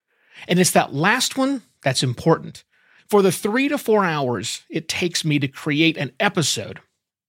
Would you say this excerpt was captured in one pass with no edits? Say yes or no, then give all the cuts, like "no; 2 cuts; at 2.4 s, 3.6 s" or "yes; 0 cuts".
no; 1 cut; at 3.0 s